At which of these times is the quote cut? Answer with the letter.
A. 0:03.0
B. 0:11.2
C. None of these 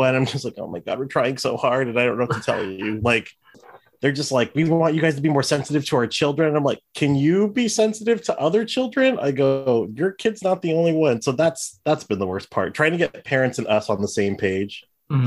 C